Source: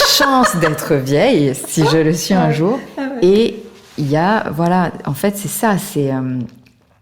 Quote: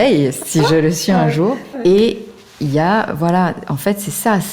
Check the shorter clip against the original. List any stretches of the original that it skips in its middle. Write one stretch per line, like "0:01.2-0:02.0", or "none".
0:02.9-0:03.1